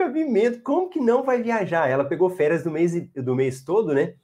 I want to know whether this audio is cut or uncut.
uncut